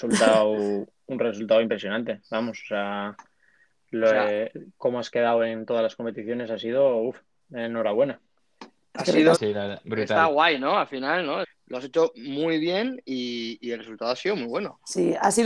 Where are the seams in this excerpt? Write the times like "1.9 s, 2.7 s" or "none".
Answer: 9.4 s, 11.4 s